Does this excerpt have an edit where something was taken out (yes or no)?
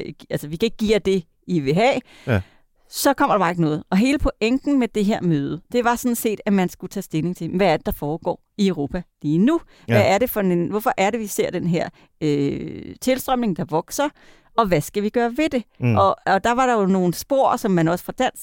no